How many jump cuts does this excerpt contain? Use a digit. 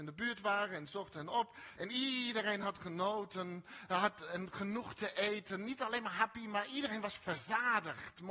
1